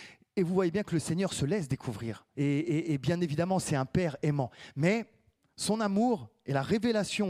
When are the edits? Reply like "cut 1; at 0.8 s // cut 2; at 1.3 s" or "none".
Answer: cut 1; at 2.3 s